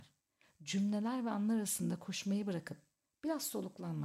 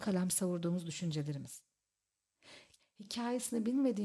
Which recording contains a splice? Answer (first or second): second